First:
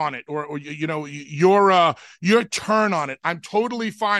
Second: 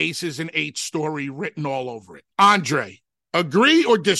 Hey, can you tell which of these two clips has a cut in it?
second; 1 cut; at 2.3 s

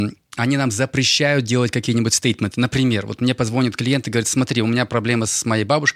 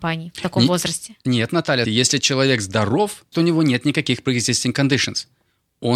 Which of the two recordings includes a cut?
second; 2 cuts; at 1.8 s, 3.3 s

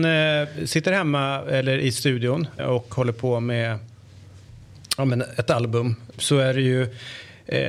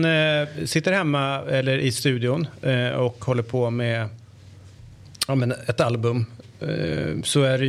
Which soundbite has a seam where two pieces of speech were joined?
first; 2 cuts; at 2.6 s, 6.2 s

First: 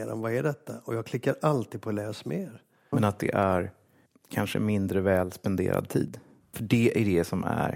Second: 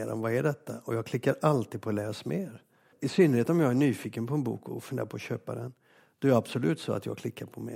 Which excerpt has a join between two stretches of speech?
first; 2 cuts; at 2.9 s, 6.4 s

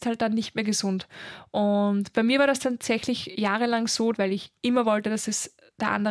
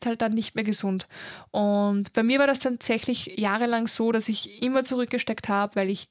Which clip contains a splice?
first; 1 cut; at 4.1 s

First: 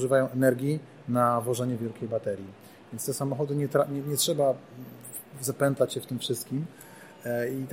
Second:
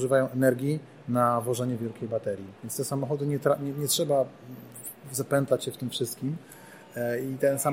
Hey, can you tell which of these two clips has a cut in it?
second; 1 cut; at 2.6 s

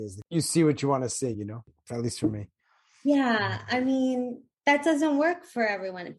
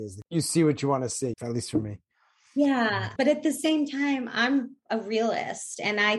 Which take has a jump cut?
second; 2 cuts; at 1.3 s, 3.2 s

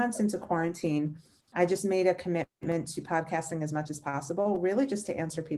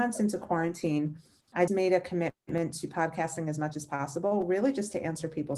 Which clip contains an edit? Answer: second; 1 cut; at 1.7 s

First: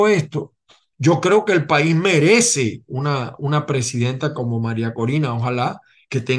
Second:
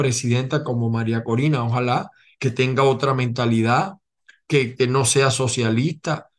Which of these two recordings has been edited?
first; 1 cut; at 0.9 s

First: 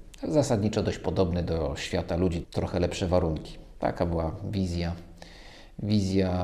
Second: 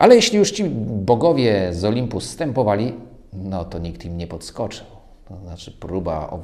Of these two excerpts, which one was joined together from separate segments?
first; 1 cut; at 2.4 s

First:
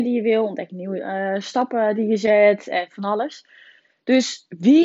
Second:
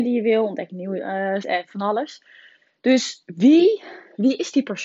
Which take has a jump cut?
second; 1 cut; at 1.4 s

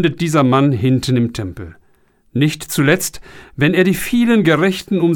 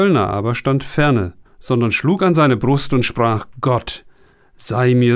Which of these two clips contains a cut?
second; 1 cut; at 1.5 s

